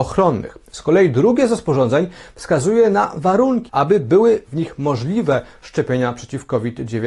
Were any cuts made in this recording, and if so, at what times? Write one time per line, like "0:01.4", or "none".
0:03.7